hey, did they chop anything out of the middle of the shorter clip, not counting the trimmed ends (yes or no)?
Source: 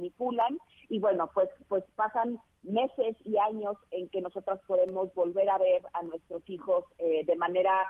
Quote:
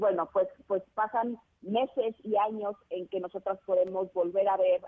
no